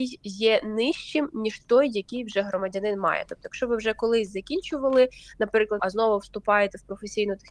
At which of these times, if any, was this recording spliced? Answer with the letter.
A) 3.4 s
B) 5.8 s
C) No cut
B